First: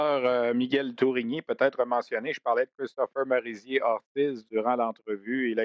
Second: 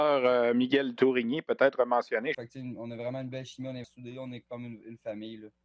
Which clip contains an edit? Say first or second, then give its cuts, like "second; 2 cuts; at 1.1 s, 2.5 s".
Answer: second; 2 cuts; at 2.3 s, 3.8 s